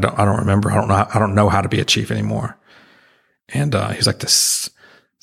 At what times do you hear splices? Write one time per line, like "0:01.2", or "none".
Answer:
0:03.4